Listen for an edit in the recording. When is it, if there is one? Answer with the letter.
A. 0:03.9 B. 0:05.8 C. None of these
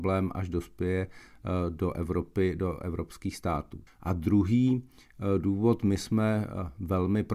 A